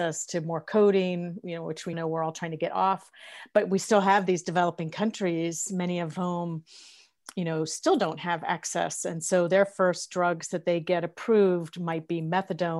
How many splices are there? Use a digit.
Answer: 1